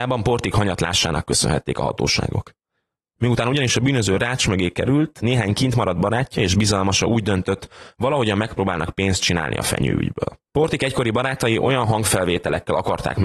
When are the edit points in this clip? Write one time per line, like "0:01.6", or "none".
none